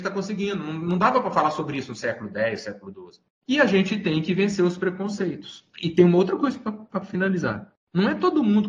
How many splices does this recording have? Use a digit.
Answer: 1